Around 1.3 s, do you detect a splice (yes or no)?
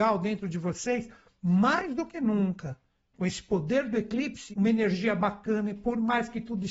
no